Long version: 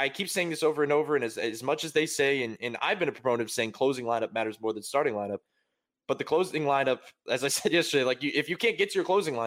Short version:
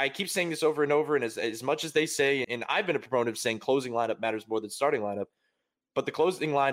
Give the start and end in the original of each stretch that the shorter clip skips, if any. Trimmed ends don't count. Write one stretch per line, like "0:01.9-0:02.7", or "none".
0:02.4-0:02.6